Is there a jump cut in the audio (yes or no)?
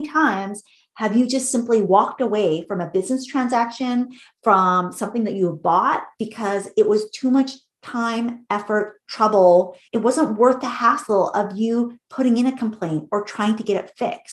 yes